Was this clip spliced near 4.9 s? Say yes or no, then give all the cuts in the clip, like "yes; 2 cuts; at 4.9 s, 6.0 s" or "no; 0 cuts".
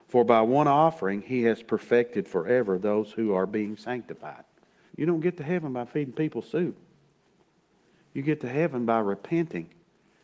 yes; 1 cut; at 4.9 s